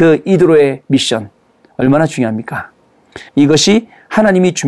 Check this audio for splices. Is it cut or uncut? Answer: cut